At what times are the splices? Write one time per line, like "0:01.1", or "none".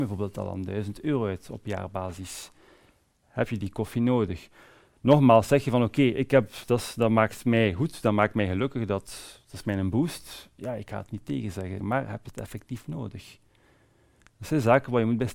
0:11.8